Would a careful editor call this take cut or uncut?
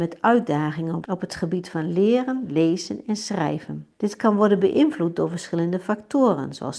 uncut